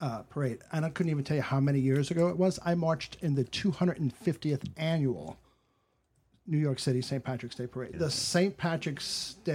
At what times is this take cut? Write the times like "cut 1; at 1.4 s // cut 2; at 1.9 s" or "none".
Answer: cut 1; at 7.9 s